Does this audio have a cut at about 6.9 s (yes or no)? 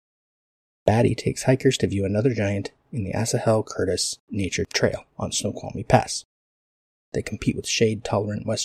yes